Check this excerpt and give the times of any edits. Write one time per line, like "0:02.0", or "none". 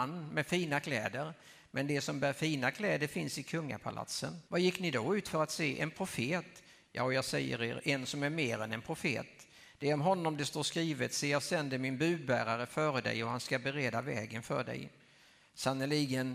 0:04.5